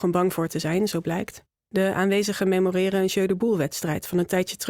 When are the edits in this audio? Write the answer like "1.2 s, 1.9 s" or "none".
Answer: 1.6 s

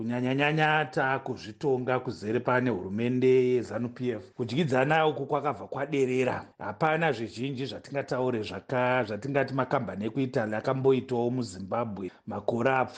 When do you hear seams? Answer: 12.1 s

